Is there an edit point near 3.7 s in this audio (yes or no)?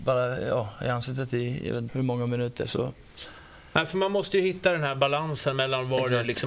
no